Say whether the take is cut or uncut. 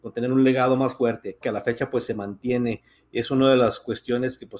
cut